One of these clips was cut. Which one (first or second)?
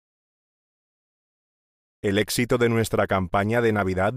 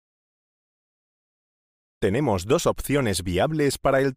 second